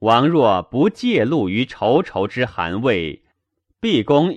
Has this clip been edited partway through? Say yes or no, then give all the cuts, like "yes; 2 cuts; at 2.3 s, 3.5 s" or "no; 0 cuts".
no; 0 cuts